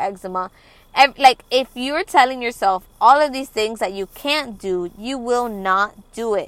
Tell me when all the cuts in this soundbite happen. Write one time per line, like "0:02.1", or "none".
none